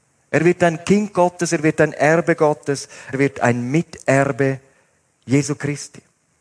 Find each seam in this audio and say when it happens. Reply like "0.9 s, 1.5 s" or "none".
3.1 s